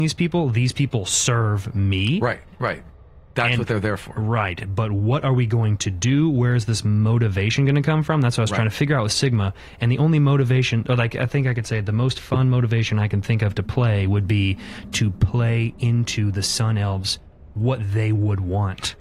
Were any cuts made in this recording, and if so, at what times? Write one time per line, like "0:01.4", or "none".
none

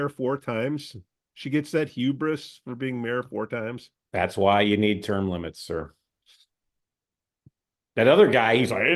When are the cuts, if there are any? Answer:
none

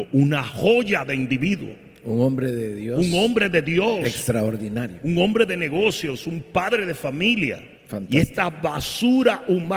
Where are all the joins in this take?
0:07.8

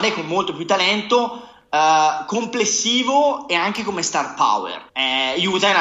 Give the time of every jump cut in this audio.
0:04.9

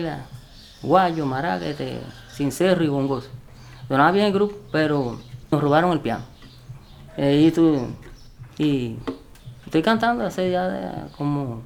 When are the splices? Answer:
0:07.1
0:08.6

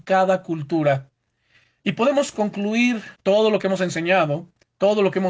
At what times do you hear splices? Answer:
0:03.1

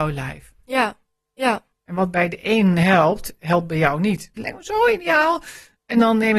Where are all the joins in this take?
0:01.3
0:04.4

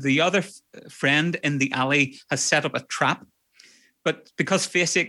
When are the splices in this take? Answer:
none

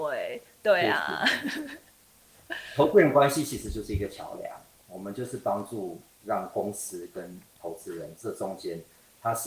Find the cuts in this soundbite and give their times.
none

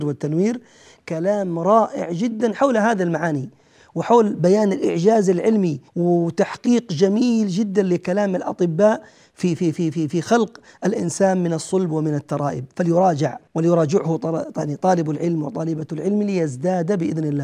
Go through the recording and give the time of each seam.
0:05.9
0:13.5

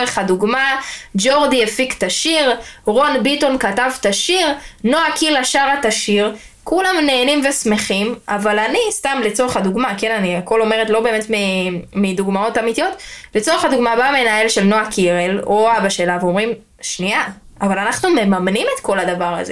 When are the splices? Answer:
none

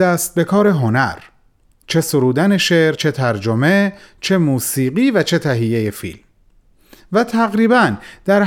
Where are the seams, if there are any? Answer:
none

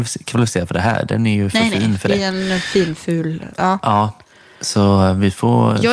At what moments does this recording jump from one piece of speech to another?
none

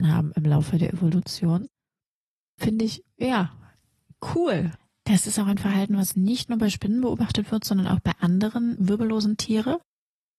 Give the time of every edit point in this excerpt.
none

